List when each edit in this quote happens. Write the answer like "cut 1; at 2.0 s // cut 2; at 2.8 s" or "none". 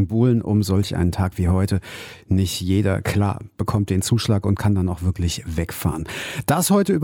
none